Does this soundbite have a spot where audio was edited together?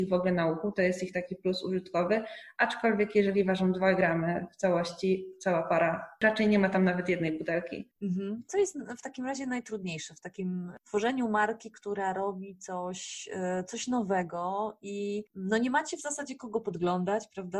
no; 0 cuts

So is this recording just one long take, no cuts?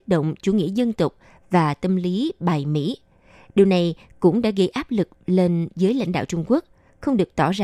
yes; 0 cuts

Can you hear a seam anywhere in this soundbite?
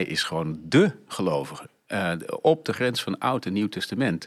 no; 0 cuts

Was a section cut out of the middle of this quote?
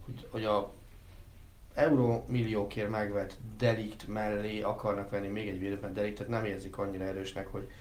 no; 0 cuts

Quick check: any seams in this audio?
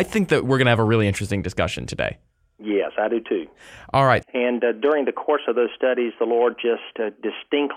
yes; 1 cut; at 4.2 s

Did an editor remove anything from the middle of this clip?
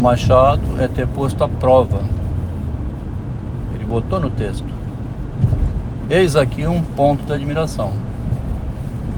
no; 0 cuts

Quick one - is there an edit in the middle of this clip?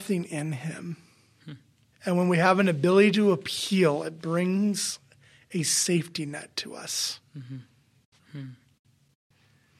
yes; 2 cuts; at 1.9 s, 8.2 s

